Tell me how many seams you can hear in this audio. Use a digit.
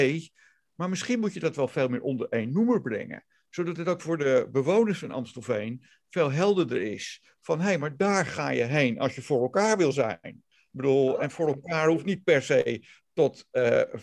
0